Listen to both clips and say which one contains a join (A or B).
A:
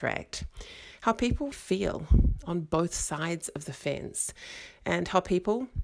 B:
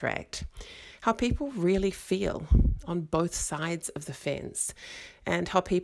A